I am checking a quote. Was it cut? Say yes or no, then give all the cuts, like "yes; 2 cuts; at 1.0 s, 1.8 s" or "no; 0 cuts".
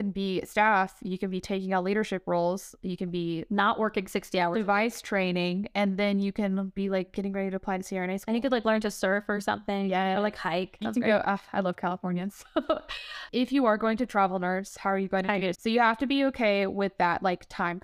yes; 2 cuts; at 10.8 s, 15.5 s